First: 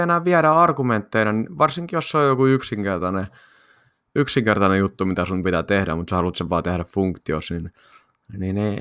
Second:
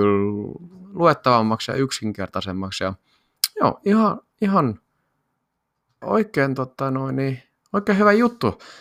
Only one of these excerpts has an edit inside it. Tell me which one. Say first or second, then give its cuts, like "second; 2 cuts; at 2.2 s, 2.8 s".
second; 1 cut; at 6.0 s